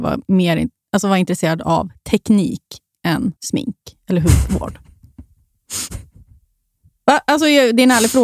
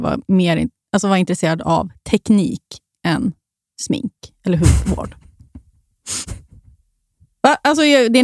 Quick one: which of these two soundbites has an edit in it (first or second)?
first